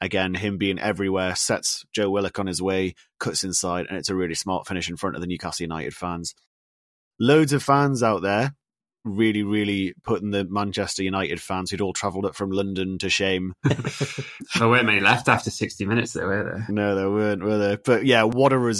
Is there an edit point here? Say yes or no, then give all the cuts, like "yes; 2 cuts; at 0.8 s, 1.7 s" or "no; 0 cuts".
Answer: yes; 1 cut; at 14.6 s